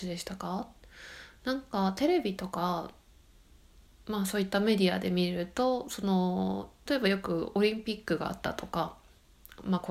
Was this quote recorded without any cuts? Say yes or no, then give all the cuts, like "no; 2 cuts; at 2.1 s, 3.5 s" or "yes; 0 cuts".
no; 1 cut; at 6.9 s